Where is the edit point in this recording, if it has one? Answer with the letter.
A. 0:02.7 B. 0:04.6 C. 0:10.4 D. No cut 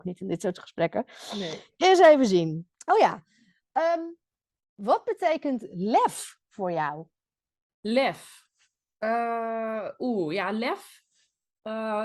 A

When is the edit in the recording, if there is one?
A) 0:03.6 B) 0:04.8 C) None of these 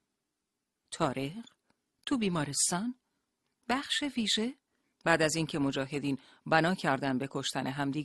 B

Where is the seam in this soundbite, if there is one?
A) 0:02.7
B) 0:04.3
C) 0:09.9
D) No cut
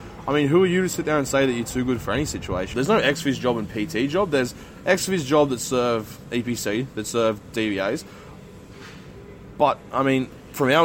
A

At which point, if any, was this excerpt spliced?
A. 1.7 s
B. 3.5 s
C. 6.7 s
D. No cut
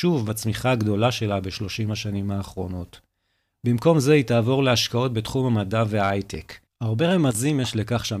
C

